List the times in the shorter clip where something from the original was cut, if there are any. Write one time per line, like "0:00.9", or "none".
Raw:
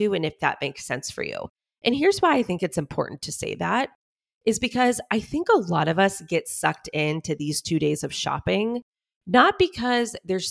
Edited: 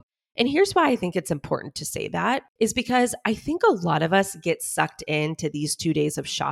0:02.5